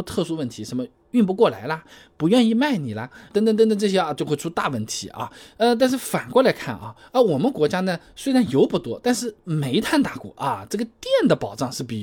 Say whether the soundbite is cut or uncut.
uncut